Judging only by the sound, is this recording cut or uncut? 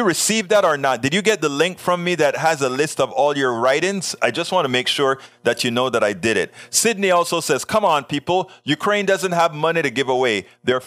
uncut